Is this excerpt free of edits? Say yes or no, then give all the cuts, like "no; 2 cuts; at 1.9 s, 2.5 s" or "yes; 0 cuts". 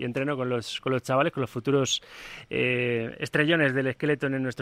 yes; 0 cuts